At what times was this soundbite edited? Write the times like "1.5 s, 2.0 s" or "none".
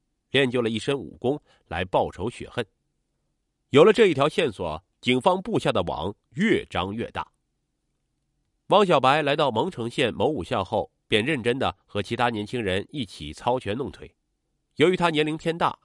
none